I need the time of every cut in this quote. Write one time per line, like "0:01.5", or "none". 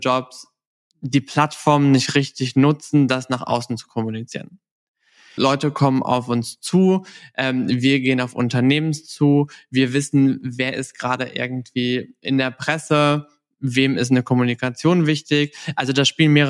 0:05.4